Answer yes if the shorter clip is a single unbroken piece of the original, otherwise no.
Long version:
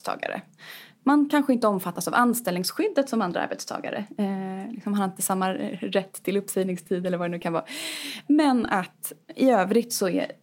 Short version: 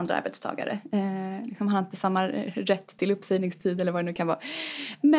yes